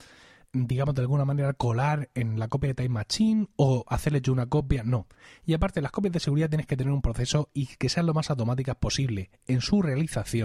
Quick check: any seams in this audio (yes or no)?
no